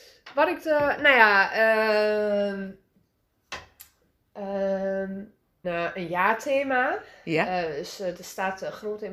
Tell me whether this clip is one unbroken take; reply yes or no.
no